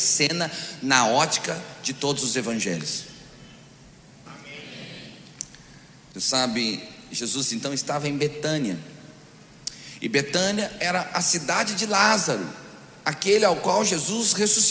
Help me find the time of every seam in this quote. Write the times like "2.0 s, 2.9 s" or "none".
4.3 s